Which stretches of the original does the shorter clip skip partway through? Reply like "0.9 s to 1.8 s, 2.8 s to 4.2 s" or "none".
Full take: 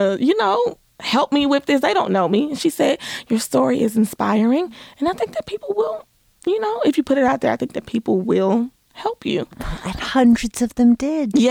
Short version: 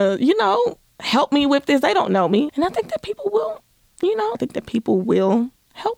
2.5 s to 4.9 s, 6.8 s to 7.5 s